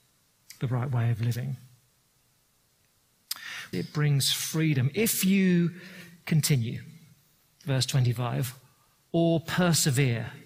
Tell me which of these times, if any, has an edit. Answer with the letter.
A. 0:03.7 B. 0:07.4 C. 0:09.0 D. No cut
A